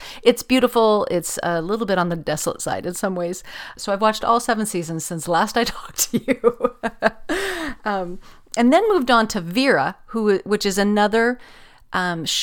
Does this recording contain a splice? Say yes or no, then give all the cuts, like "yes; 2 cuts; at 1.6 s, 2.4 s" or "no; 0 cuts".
yes; 1 cut; at 3.8 s